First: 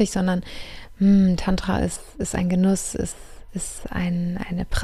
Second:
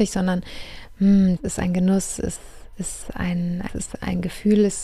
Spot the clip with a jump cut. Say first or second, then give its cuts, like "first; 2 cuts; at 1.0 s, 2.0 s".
second; 2 cuts; at 1.4 s, 3.7 s